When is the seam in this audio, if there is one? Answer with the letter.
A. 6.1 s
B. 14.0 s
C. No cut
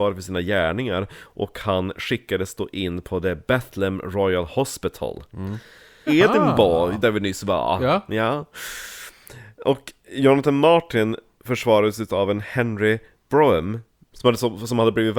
A